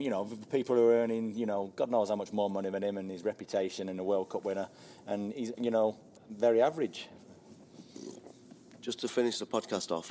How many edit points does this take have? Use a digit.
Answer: 1